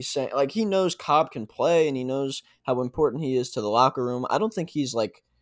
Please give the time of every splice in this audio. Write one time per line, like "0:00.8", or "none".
none